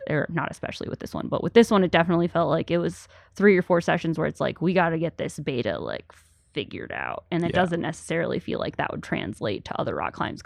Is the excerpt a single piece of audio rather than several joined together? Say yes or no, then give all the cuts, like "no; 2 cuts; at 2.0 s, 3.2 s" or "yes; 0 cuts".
yes; 0 cuts